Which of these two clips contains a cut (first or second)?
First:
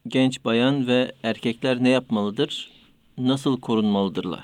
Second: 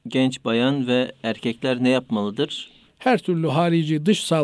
second